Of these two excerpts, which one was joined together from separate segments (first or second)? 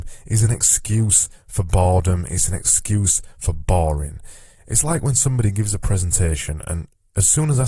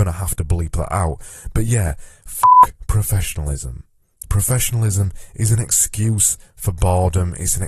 second